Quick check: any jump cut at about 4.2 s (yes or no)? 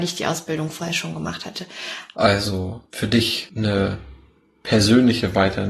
no